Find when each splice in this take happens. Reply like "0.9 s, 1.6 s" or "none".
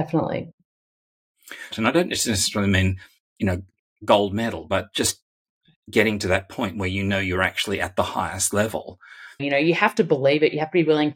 1.7 s, 9.4 s